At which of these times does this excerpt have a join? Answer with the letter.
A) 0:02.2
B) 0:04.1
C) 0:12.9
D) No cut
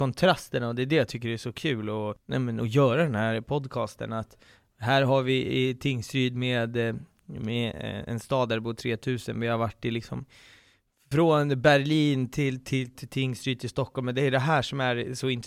C